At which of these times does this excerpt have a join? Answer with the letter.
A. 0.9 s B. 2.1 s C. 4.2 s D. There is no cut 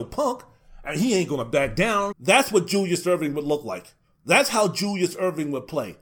B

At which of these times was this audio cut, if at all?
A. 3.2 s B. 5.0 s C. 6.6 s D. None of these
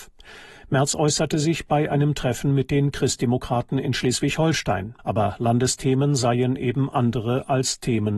B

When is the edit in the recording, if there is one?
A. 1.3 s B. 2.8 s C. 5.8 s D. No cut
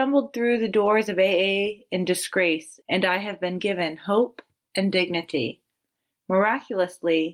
B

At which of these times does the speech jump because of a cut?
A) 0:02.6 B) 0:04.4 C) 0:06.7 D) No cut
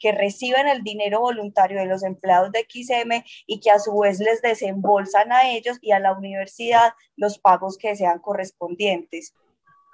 D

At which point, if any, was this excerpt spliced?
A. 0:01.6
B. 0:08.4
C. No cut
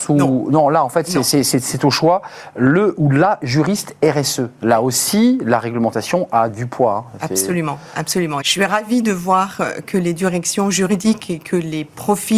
B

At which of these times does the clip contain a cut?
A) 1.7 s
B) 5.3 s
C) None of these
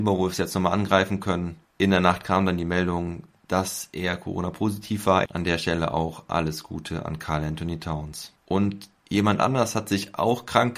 B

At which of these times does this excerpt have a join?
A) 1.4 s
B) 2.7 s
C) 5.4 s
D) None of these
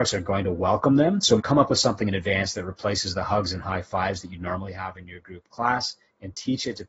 A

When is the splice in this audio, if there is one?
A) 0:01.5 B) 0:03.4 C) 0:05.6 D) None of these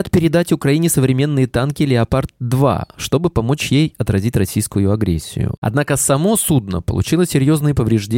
C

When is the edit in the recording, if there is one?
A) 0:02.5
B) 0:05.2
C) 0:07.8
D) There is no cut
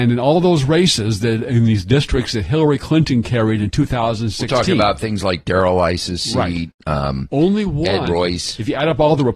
D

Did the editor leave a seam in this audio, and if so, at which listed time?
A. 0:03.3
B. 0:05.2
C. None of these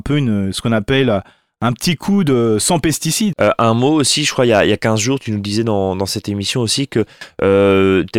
A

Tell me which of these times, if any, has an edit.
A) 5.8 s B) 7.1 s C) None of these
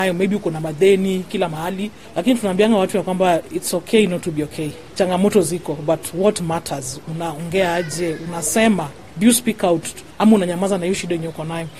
B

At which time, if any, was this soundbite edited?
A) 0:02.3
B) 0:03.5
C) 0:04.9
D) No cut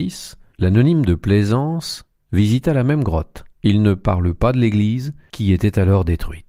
B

